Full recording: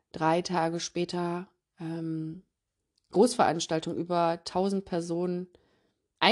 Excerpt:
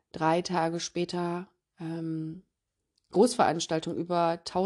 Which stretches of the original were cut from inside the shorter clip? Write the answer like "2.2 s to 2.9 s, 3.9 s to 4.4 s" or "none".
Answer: none